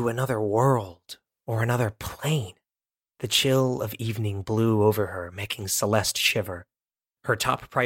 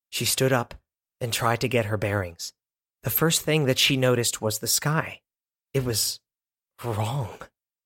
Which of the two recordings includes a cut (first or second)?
second